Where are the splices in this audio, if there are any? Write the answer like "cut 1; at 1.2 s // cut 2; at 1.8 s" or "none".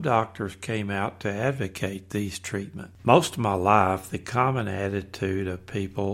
cut 1; at 3.0 s